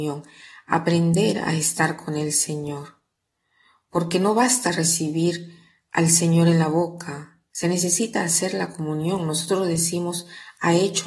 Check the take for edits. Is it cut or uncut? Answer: uncut